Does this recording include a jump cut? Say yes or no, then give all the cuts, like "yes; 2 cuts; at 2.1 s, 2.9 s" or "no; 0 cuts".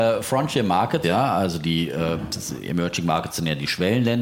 yes; 1 cut; at 1.0 s